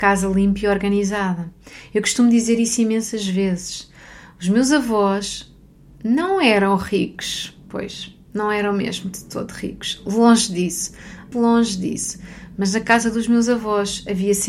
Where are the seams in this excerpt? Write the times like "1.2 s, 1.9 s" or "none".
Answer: 11.3 s